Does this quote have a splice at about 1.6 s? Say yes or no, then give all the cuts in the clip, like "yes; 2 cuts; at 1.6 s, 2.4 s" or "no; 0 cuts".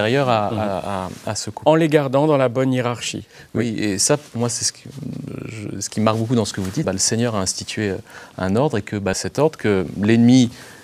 no; 2 cuts; at 6.8 s, 9.1 s